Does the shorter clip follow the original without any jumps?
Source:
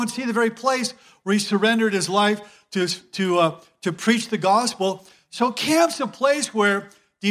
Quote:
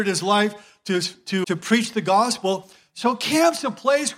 no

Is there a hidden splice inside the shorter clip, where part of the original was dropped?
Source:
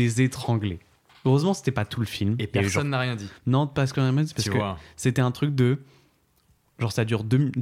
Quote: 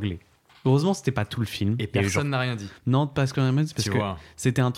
no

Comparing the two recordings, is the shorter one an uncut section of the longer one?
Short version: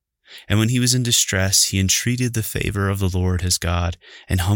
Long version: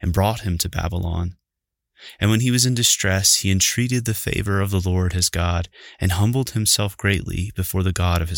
yes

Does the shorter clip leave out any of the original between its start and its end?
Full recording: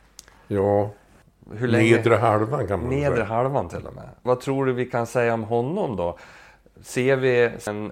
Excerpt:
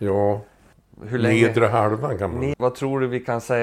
yes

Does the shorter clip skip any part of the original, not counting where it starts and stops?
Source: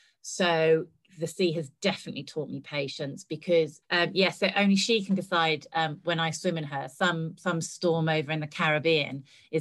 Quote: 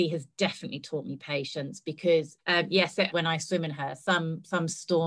yes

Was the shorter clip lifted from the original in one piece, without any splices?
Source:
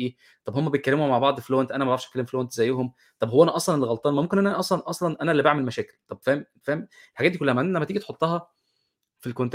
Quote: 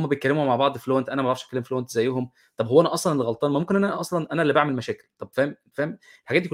no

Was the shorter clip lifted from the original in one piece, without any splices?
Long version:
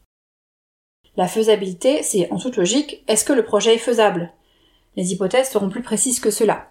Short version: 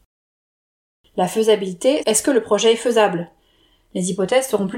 no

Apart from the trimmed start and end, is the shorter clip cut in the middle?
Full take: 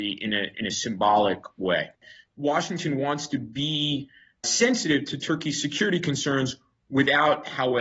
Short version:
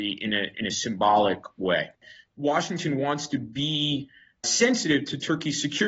no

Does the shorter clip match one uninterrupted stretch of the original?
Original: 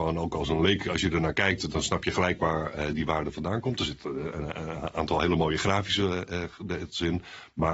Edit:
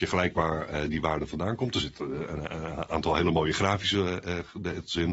yes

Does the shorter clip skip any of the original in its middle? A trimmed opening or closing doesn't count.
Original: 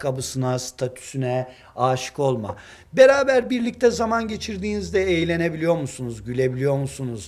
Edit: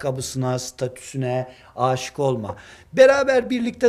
no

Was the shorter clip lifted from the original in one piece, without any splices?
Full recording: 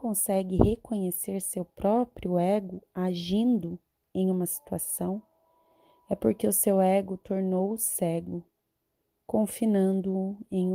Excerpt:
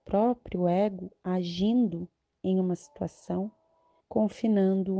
no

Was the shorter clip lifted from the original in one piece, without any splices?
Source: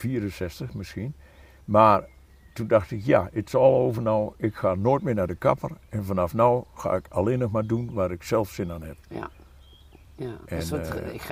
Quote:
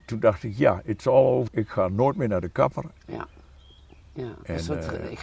no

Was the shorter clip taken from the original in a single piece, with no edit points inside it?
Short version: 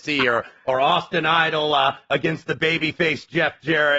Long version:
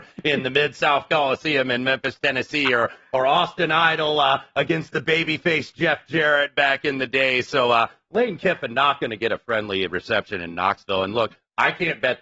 yes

